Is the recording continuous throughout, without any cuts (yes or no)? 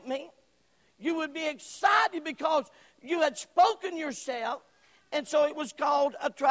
yes